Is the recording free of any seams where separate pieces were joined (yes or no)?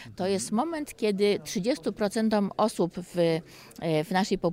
yes